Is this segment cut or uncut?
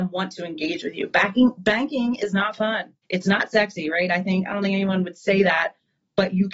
cut